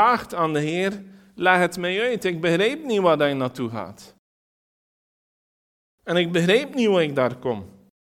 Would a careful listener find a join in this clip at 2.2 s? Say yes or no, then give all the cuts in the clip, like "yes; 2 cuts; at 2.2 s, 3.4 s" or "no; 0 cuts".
no; 0 cuts